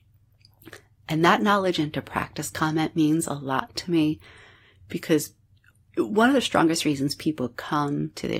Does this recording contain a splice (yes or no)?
no